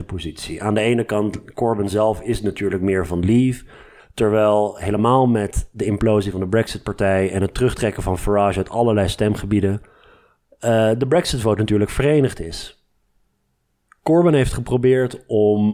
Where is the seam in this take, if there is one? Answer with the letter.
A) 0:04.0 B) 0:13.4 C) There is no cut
A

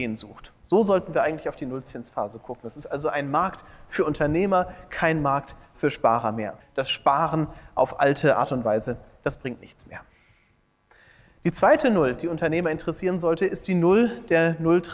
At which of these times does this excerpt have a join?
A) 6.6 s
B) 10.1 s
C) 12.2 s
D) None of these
A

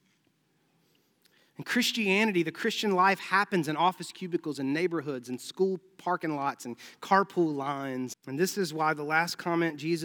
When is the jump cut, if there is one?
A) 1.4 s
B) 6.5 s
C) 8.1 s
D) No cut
C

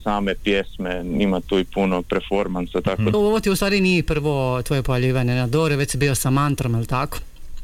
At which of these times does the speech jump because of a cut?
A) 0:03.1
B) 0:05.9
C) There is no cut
A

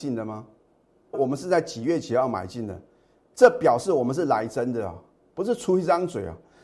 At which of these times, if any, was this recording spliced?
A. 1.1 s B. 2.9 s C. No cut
A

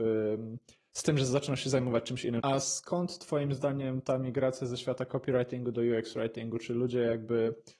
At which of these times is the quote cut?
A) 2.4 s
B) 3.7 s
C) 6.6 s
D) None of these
A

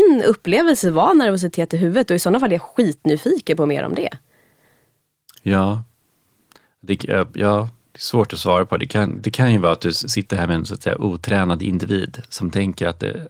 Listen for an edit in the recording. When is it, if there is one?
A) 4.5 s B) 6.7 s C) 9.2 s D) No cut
D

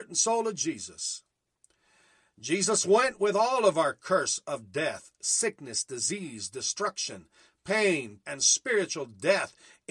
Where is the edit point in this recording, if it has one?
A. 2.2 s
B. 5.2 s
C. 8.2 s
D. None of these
C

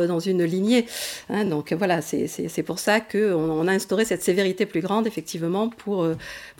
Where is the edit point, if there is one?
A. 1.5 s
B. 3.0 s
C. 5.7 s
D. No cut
D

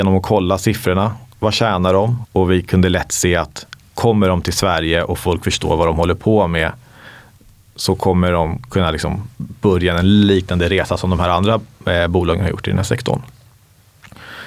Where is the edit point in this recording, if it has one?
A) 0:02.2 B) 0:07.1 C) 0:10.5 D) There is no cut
A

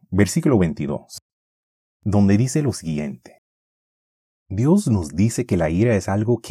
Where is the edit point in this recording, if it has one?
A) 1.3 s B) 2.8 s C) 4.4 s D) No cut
C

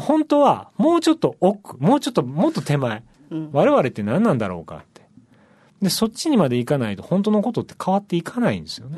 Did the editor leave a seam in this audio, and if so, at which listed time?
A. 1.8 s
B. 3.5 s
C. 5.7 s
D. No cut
B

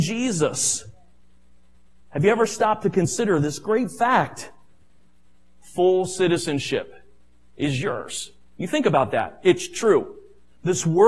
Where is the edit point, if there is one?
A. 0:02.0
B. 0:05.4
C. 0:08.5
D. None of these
C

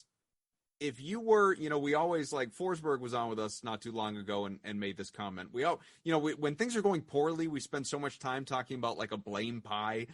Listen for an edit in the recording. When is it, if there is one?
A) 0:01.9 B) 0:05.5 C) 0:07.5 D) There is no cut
D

